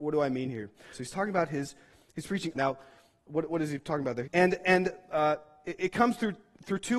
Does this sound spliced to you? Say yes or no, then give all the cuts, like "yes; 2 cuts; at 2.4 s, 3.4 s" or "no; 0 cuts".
yes; 3 cuts; at 0.9 s, 2.5 s, 4.2 s